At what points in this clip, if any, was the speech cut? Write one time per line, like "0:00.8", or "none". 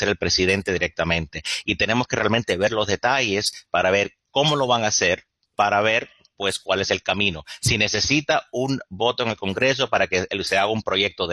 none